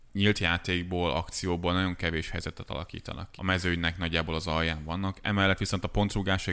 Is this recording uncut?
no; 1 cut; at 3.4 s

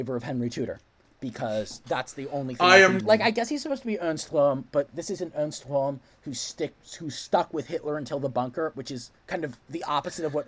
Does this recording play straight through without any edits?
no; 3 cuts; at 3.0 s, 4.9 s, 9.2 s

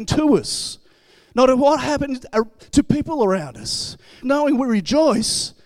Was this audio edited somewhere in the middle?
yes; 1 cut; at 4.2 s

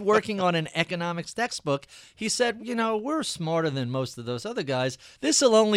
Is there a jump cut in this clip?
yes; 1 cut; at 2.6 s

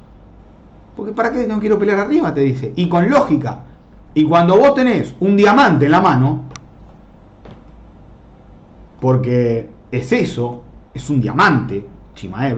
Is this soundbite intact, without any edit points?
yes; 0 cuts

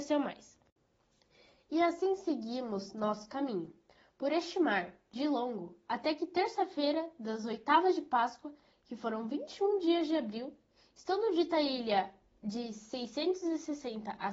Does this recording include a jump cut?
no; 0 cuts

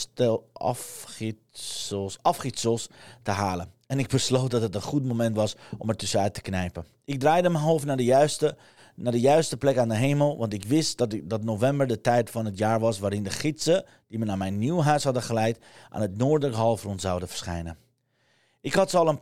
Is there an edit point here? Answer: yes; 1 cut; at 7.0 s

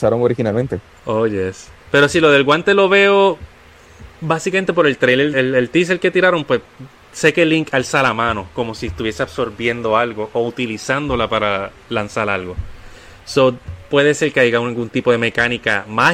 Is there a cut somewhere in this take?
yes; 2 cuts; at 1.8 s, 5.3 s

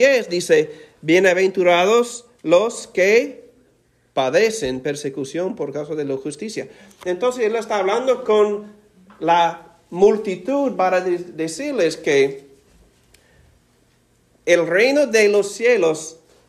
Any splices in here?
no; 0 cuts

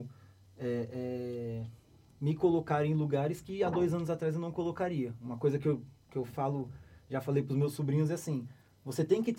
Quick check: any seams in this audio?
no; 0 cuts

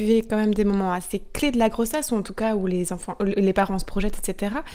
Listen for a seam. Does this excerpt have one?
no; 0 cuts

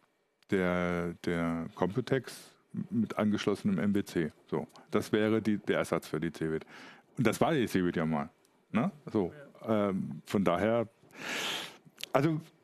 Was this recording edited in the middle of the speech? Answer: no; 0 cuts

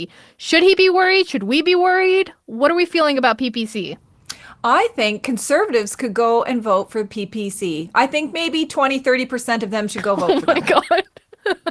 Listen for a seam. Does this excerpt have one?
no; 0 cuts

